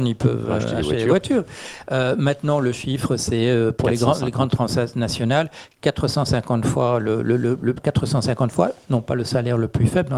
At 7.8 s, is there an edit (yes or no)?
yes